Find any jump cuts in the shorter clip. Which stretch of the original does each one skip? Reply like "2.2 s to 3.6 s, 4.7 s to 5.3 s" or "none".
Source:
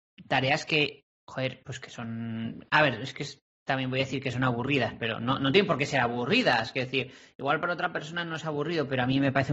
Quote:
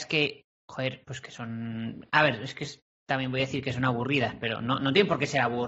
none